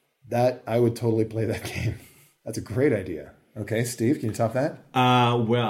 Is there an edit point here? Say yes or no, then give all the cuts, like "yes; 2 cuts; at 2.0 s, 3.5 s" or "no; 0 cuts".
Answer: no; 0 cuts